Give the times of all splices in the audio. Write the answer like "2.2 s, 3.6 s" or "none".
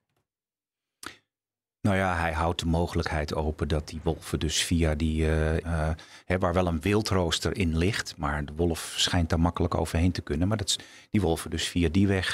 5.6 s